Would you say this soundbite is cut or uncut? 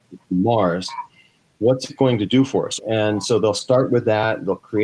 cut